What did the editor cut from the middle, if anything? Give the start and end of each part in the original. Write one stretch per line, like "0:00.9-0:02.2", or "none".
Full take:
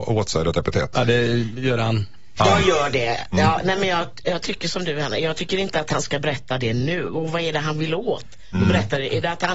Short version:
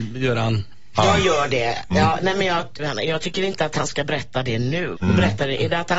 0:04.2-0:04.9
0:07.1-0:08.5